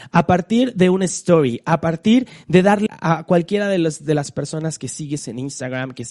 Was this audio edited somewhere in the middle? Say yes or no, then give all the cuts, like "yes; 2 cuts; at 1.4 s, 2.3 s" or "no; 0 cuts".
yes; 1 cut; at 2.9 s